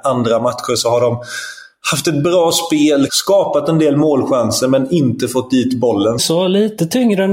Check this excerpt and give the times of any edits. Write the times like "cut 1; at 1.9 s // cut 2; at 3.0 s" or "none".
cut 1; at 3.1 s // cut 2; at 6.2 s